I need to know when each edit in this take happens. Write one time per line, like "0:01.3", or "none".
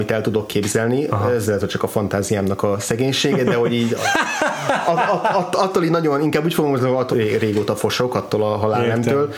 0:07.1